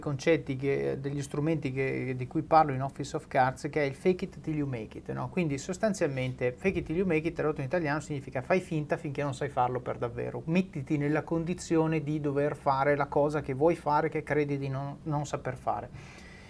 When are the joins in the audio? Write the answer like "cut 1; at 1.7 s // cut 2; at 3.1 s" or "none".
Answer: none